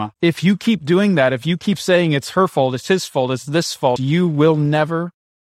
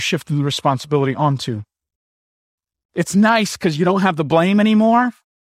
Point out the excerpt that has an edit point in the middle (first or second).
first